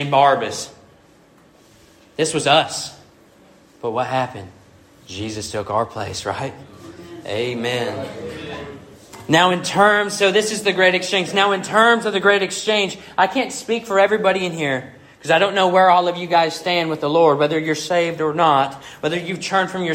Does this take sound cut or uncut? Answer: uncut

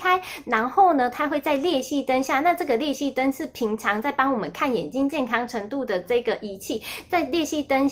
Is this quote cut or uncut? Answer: uncut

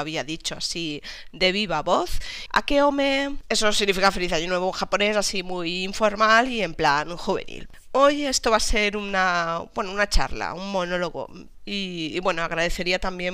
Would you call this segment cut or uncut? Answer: cut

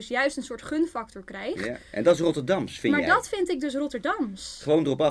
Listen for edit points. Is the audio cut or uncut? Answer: uncut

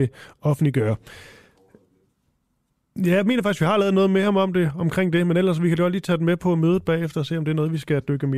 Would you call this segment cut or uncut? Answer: uncut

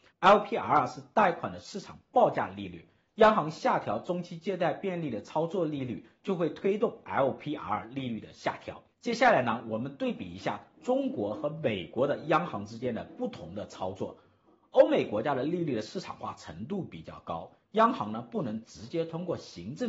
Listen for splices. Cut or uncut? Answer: cut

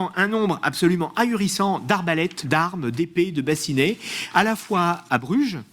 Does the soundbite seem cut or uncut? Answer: cut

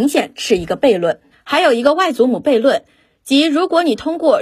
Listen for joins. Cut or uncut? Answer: cut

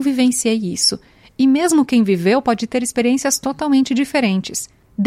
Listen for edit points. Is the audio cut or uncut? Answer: uncut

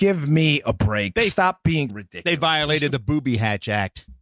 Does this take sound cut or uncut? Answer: cut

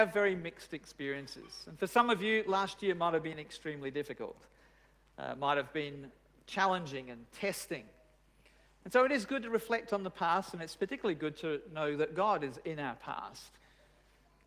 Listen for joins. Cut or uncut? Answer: uncut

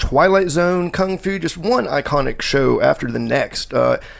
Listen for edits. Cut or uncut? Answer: uncut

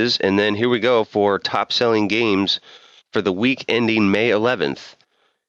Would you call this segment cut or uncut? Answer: uncut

